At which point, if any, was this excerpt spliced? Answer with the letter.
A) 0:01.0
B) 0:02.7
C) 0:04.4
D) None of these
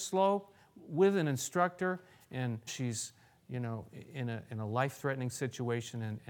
B